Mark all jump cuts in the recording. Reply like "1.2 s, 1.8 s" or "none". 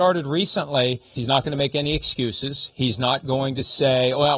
1.2 s